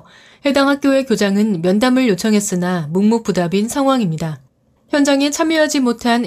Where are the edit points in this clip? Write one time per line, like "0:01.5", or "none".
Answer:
none